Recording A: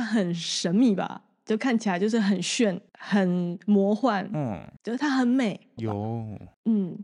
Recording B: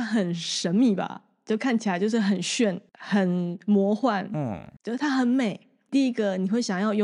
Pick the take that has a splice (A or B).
A